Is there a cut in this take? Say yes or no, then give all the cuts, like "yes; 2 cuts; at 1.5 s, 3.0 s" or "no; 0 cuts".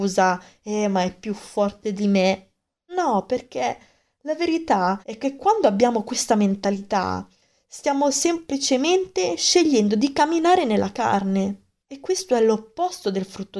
yes; 2 cuts; at 2.9 s, 5.0 s